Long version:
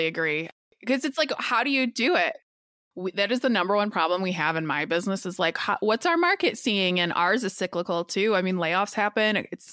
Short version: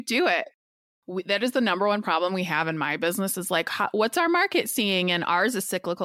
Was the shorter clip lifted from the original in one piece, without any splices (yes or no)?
yes